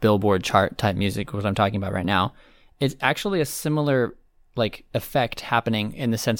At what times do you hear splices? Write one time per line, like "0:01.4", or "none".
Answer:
none